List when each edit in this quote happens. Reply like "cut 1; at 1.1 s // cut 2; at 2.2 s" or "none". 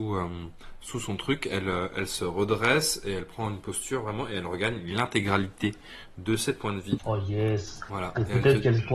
cut 1; at 7.0 s